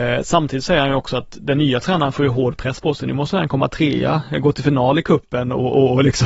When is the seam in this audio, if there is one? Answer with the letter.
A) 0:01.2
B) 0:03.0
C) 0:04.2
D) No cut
D